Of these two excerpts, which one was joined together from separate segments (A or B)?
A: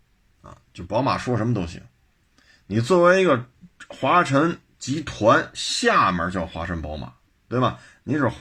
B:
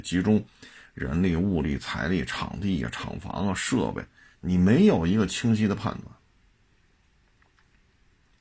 B